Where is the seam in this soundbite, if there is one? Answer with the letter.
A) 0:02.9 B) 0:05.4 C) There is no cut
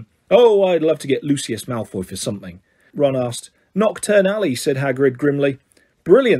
A